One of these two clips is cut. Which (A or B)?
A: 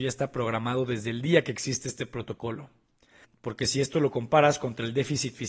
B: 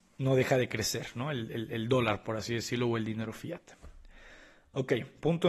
A